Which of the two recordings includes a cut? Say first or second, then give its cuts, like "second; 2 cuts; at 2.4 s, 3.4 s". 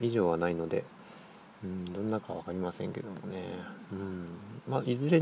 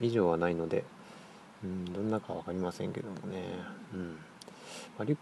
first; 1 cut; at 3.9 s